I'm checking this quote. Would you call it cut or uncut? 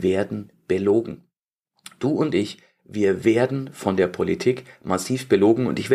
uncut